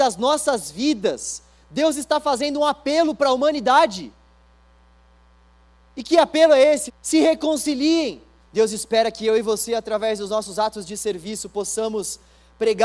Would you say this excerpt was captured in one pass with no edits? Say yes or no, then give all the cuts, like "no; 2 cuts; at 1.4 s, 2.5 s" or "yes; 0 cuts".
no; 2 cuts; at 6.9 s, 8.5 s